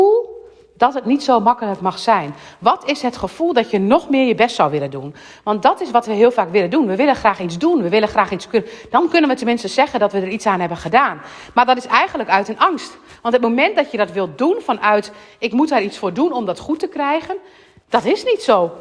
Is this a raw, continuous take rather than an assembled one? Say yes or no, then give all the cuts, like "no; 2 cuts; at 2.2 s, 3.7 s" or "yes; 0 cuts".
yes; 0 cuts